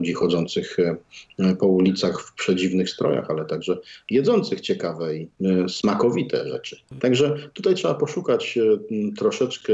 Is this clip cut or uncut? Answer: cut